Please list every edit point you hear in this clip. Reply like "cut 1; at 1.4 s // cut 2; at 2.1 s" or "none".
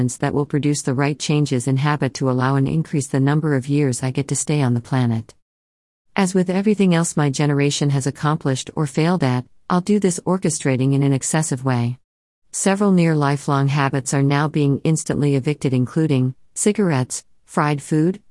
none